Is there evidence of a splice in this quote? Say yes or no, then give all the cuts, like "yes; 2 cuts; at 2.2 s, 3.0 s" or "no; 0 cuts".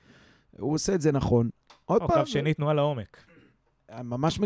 no; 0 cuts